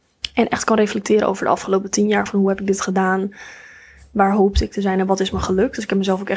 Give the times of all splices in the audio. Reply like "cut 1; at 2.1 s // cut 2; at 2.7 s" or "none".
none